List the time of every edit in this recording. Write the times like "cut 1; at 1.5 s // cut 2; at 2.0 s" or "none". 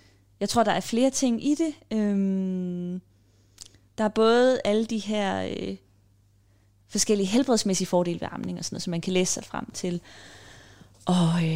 none